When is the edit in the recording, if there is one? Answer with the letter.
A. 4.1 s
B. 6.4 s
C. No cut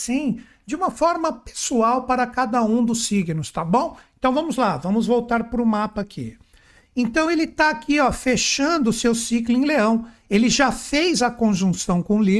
C